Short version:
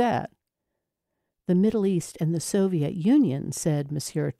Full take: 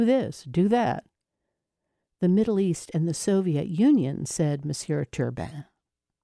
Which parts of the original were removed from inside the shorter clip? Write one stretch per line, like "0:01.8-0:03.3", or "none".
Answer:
none